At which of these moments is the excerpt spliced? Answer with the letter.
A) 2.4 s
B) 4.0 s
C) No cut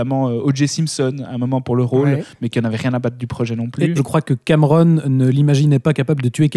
B